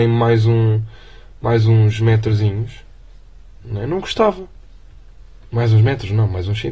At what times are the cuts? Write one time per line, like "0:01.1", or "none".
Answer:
none